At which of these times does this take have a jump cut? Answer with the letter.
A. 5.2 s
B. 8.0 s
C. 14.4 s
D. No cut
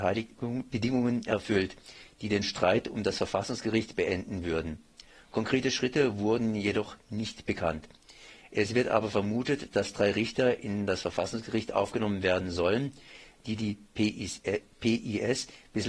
D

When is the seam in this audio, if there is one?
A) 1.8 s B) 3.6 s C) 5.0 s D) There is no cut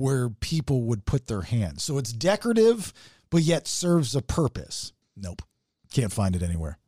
C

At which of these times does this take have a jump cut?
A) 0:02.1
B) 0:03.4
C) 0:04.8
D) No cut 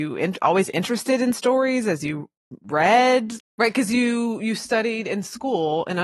B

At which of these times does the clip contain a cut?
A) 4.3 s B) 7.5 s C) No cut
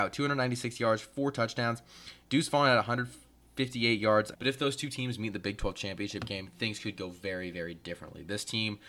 A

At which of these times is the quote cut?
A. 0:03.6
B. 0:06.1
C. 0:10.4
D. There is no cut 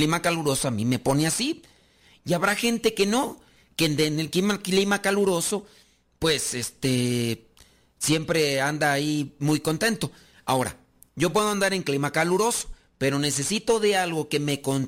D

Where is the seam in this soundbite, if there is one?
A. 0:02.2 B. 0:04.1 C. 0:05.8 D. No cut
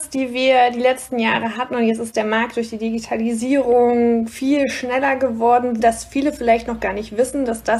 C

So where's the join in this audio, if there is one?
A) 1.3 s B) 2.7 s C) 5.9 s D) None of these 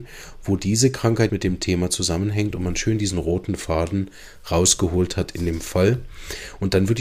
A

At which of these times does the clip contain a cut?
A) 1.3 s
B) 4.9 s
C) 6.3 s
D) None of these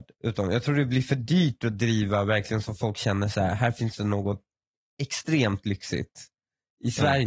D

